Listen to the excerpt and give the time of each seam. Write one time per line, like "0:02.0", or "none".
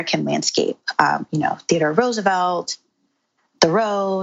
none